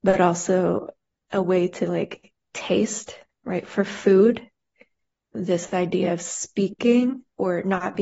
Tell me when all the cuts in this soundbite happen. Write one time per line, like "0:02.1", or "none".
0:05.3